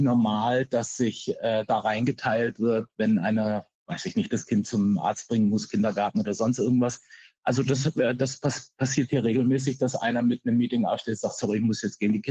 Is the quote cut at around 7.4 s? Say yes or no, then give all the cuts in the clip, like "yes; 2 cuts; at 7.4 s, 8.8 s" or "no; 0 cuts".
no; 1 cut; at 3.7 s